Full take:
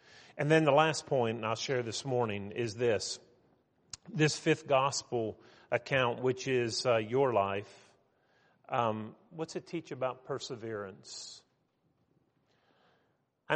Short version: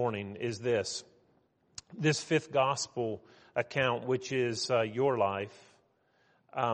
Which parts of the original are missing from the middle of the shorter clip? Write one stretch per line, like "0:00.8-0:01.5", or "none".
none